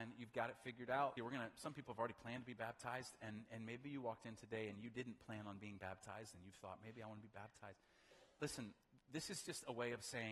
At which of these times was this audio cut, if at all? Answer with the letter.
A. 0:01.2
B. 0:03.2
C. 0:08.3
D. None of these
A